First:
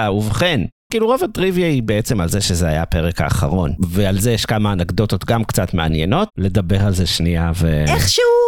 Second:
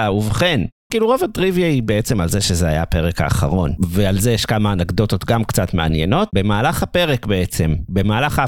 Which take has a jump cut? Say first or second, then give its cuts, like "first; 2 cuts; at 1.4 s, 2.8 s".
first; 1 cut; at 6.3 s